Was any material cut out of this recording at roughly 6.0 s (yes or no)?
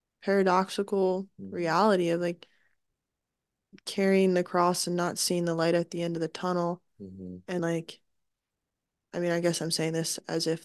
no